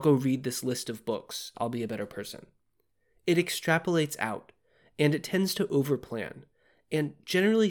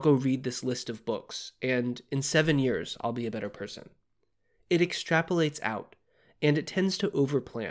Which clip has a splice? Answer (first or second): first